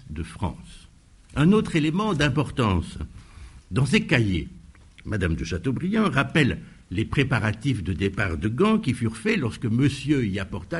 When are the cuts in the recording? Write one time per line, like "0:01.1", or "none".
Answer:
0:01.2
0:03.6